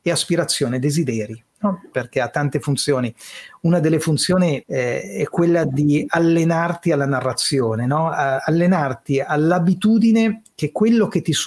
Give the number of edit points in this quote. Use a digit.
1